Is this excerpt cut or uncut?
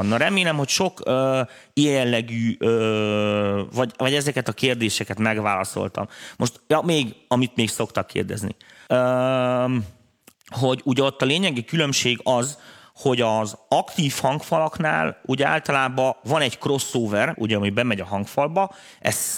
cut